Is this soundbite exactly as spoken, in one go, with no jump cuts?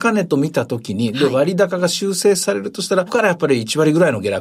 no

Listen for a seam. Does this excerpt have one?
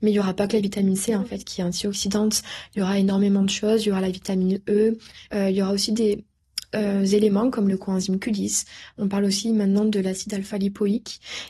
no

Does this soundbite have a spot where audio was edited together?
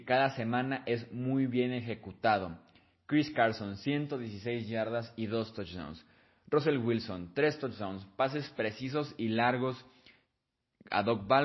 no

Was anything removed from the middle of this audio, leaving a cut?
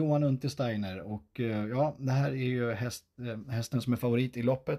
no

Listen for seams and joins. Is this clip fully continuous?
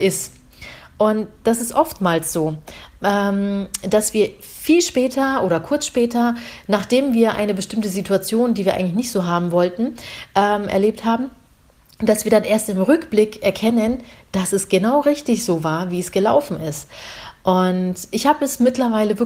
yes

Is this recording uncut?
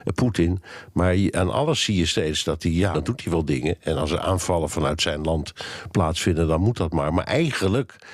no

